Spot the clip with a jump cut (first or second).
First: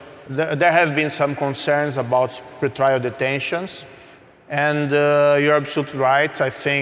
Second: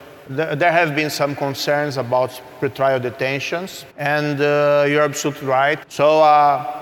second